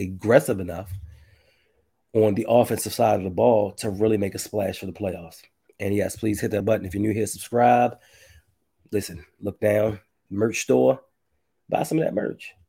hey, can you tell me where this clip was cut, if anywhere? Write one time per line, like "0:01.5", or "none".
0:06.6